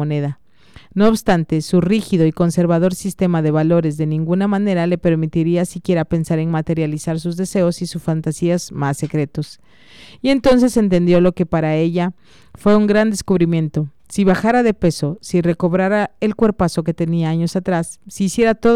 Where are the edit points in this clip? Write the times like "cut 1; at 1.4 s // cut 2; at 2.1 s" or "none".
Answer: none